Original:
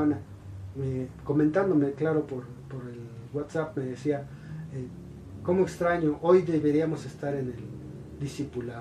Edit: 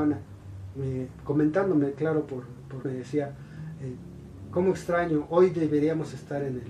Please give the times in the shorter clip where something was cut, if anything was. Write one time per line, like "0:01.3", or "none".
0:02.8